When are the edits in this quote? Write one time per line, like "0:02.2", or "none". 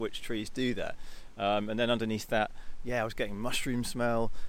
none